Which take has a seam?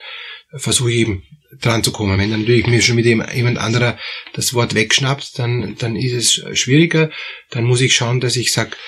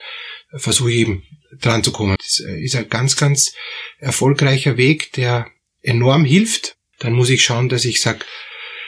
second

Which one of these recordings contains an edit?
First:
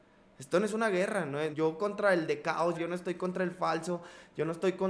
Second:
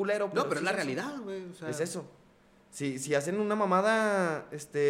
first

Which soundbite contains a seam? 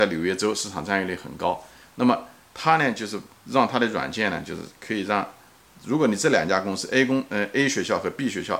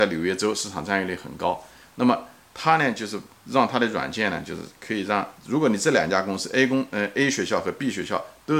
second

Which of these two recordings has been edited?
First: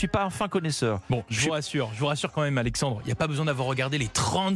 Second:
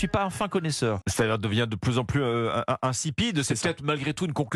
second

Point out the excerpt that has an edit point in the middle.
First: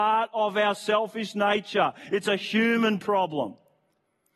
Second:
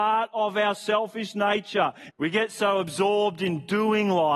second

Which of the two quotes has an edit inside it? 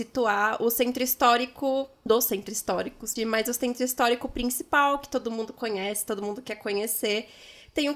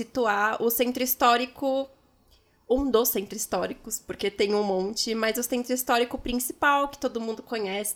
first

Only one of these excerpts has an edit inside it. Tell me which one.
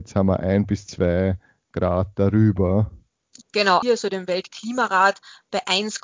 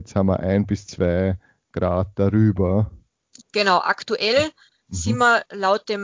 first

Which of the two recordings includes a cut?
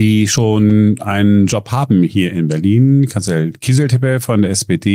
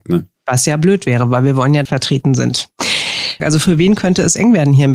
second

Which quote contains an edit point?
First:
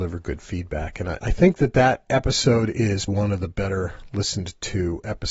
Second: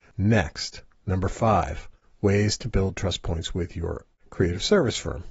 first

